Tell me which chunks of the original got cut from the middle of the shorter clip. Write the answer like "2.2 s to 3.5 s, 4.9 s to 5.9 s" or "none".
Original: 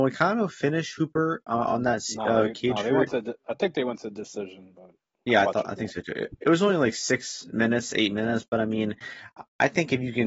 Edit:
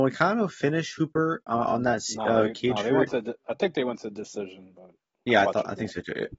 none